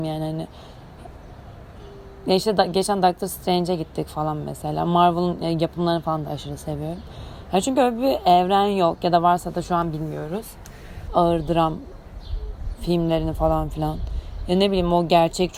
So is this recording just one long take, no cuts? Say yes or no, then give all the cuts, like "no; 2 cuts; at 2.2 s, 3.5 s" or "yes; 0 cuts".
no; 1 cut; at 11.1 s